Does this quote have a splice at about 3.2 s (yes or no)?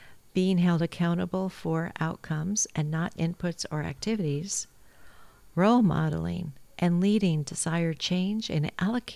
yes